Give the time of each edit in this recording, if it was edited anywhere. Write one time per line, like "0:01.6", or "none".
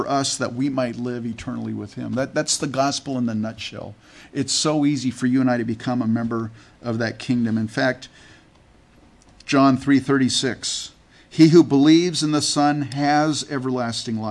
none